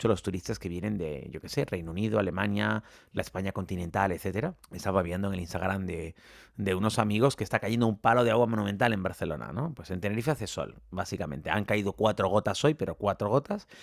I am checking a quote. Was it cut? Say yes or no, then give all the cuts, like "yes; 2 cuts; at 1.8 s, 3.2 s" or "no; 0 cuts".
yes; 1 cut; at 4.6 s